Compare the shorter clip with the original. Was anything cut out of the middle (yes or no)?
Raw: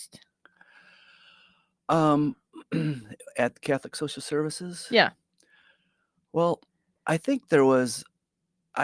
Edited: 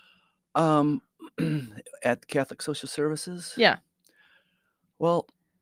no